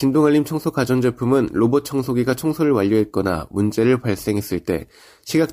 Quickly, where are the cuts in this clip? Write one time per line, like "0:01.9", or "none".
none